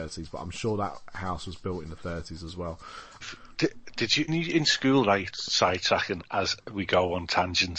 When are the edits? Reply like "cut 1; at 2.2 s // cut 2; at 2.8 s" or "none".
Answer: cut 1; at 3.2 s // cut 2; at 4.3 s // cut 3; at 5.3 s